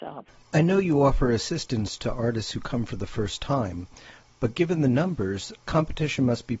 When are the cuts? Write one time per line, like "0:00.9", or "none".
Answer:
none